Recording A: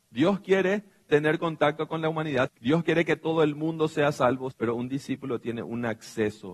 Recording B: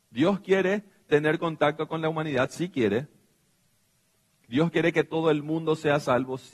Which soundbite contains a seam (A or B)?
A